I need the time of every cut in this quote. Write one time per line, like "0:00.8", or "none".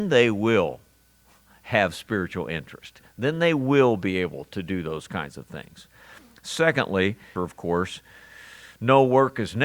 0:07.4